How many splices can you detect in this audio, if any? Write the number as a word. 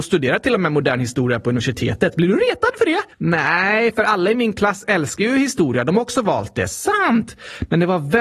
one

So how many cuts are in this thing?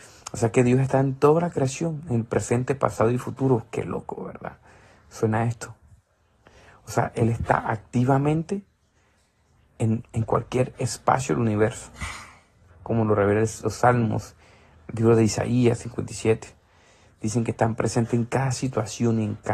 one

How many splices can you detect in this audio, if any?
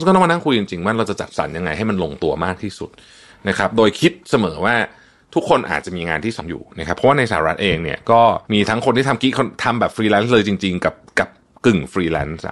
two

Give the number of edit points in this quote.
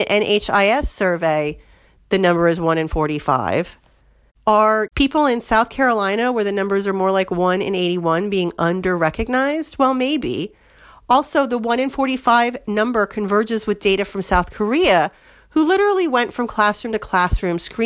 zero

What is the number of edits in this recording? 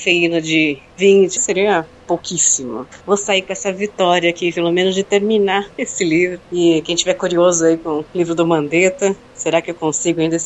two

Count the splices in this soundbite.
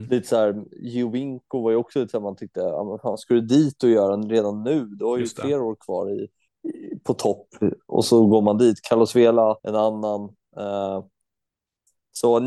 two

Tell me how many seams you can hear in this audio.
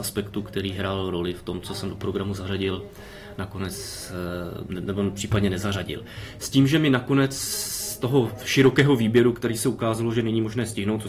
one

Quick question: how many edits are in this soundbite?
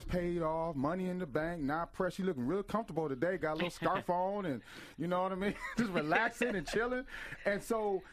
zero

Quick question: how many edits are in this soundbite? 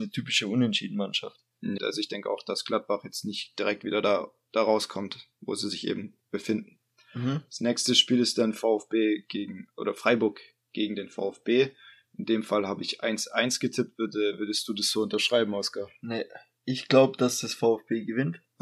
one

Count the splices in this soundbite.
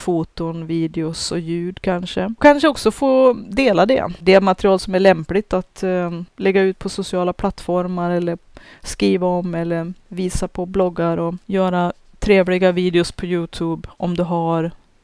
one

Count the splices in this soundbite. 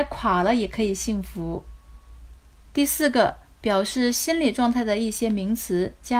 zero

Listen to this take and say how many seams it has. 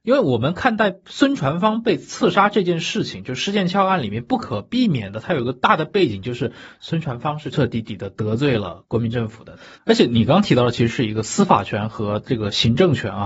two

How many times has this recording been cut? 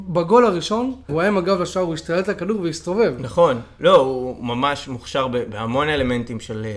one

